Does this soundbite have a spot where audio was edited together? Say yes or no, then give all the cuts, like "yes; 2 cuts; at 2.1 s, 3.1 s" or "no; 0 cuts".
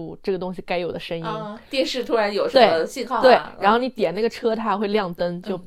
no; 0 cuts